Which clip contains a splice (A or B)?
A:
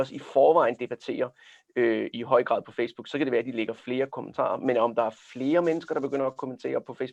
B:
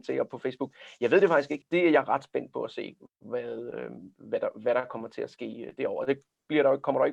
A